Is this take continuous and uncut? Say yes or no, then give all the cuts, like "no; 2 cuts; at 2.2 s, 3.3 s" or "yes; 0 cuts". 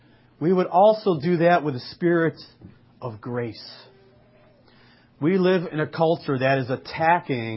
yes; 0 cuts